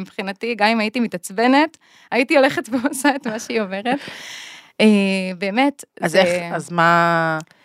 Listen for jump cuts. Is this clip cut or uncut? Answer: uncut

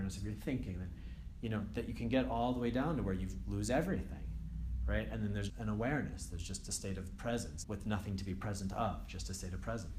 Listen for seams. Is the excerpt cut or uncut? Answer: cut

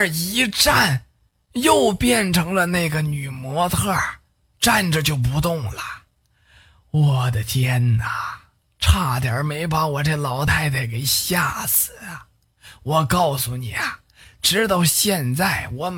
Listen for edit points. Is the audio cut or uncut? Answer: uncut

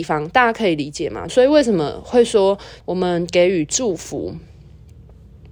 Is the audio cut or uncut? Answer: cut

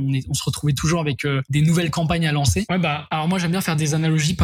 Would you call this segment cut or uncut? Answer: cut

